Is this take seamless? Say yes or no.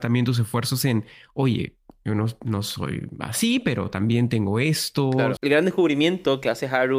no